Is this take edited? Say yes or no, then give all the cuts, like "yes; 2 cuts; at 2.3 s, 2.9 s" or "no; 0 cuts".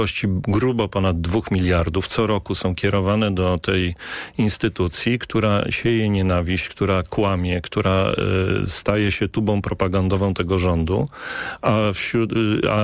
no; 0 cuts